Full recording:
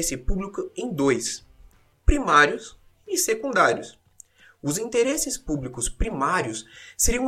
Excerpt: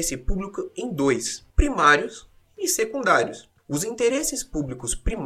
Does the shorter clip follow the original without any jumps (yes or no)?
no